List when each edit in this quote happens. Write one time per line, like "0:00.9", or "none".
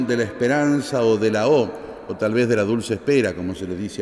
none